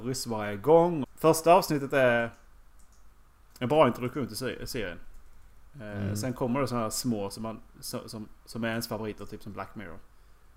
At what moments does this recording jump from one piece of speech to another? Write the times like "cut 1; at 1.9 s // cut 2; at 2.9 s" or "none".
cut 1; at 1.0 s